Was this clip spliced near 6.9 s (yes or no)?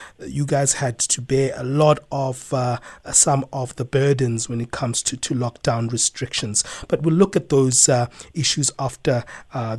no